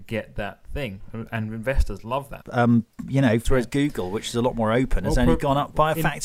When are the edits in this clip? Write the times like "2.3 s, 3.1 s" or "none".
2.4 s, 3.4 s